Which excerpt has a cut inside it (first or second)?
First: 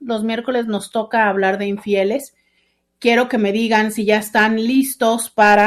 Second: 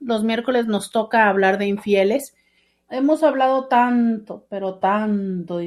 second